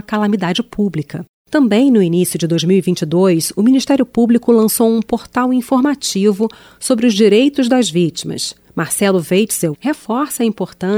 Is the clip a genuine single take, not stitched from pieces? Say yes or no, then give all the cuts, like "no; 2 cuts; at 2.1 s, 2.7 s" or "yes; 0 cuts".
no; 2 cuts; at 1.3 s, 9.7 s